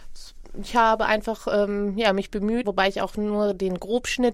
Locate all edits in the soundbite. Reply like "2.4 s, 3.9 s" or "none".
2.6 s